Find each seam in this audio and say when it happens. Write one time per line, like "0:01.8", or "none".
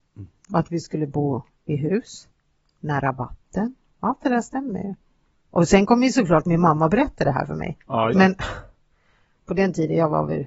0:05.3
0:08.1